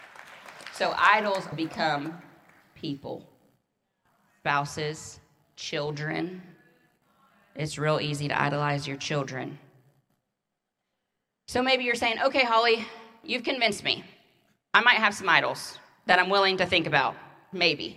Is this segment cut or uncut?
cut